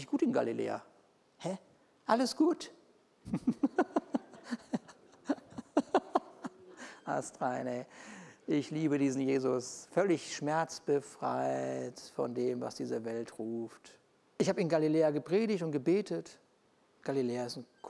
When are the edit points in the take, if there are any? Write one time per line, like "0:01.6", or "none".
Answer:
0:03.2
0:14.2